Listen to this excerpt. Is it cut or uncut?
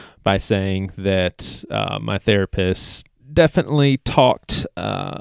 uncut